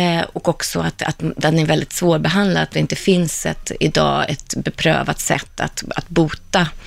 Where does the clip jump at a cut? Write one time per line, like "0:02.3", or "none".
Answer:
none